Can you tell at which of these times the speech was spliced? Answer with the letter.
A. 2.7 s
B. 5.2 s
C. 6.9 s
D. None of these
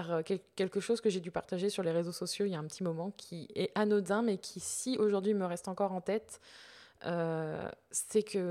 D